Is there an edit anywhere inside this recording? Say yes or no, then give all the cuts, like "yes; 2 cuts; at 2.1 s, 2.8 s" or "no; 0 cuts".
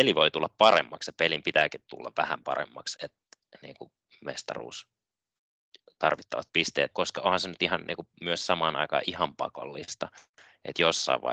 yes; 2 cuts; at 3.0 s, 6.9 s